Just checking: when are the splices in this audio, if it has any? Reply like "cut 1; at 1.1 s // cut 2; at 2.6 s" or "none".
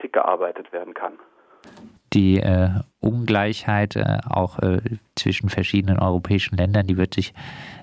cut 1; at 2.0 s